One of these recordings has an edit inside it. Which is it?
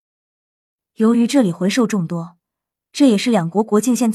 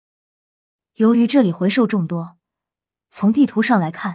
second; 1 cut; at 2.9 s

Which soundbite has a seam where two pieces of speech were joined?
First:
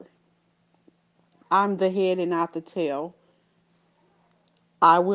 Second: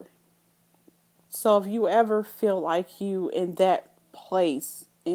second; 1 cut; at 1.2 s

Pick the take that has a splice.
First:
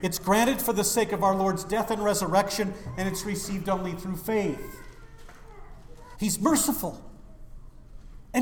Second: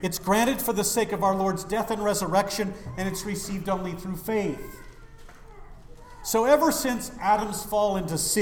first; 1 cut; at 6.1 s

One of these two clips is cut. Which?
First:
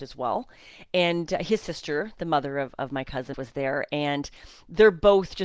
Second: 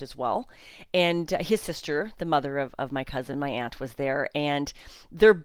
first; 1 cut; at 3.3 s

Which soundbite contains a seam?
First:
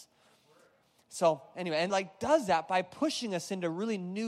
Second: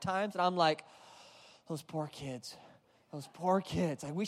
first; 1 cut; at 1.9 s

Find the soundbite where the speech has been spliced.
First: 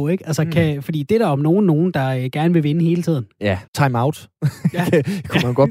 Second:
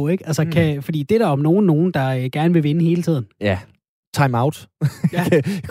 first; 1 cut; at 3.7 s

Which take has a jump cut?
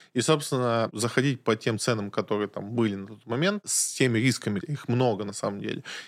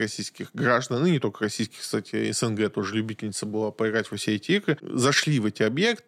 first; 1 cut; at 4.6 s

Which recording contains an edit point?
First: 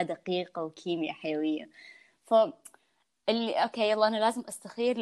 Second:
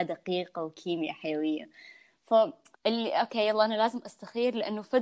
second; 1 cut; at 2.7 s

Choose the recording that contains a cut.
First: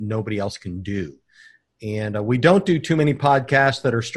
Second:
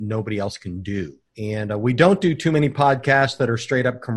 second; 1 cut; at 1.3 s

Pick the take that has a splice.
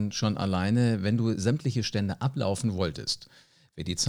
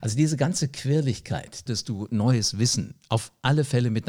second; 1 cut; at 1.7 s

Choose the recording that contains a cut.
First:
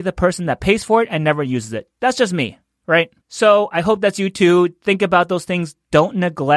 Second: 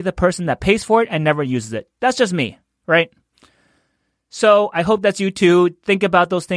first; 1 cut; at 3.2 s

